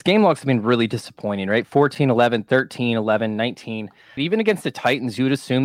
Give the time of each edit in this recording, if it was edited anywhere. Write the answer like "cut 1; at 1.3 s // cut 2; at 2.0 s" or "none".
cut 1; at 4.2 s